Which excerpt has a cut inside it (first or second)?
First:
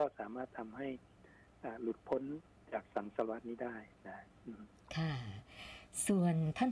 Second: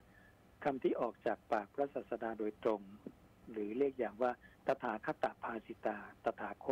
second